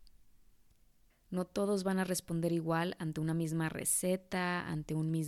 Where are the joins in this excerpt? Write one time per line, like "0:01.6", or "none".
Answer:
0:01.1